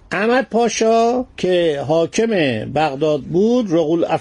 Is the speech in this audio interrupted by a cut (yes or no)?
yes